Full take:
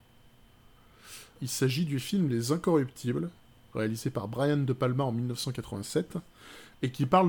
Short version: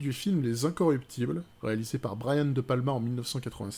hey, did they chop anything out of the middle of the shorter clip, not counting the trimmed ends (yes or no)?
yes